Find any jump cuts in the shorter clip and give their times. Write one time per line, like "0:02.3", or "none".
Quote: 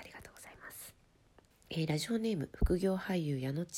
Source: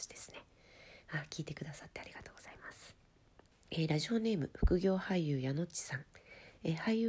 none